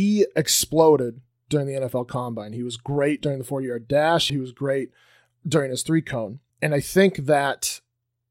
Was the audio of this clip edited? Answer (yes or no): yes